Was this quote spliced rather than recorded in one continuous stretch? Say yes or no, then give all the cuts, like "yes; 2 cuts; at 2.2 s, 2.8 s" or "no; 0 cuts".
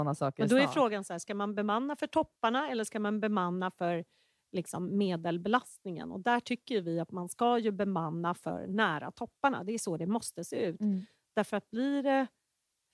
no; 0 cuts